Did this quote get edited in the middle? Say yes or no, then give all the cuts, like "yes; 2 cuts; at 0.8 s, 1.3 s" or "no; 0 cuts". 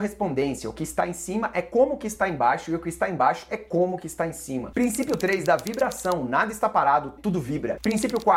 yes; 1 cut; at 7.2 s